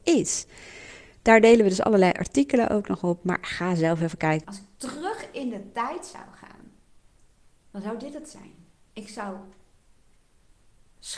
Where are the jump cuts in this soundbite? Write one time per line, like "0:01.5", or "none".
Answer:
0:04.4
0:07.5